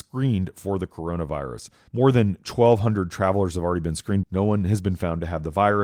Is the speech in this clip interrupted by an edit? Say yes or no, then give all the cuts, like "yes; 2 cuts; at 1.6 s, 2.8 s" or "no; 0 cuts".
yes; 2 cuts; at 1.9 s, 4.2 s